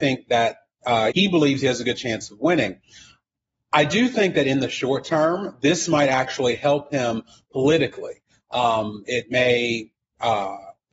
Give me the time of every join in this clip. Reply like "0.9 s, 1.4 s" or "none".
1.1 s